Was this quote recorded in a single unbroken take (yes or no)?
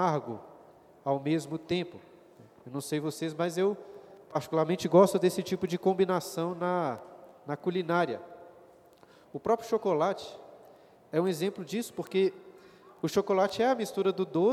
yes